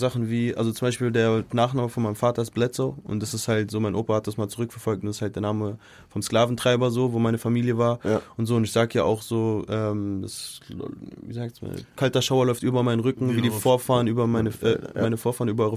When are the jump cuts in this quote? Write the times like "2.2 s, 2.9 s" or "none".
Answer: none